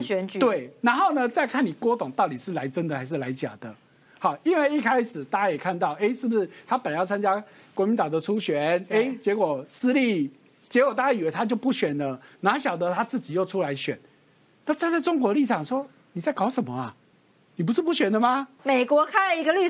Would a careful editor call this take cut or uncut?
cut